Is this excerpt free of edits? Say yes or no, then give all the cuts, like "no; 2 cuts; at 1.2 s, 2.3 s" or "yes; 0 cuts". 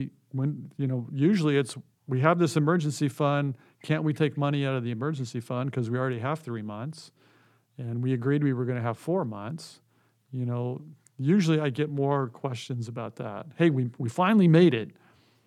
yes; 0 cuts